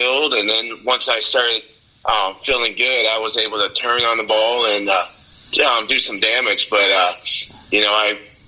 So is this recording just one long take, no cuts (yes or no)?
yes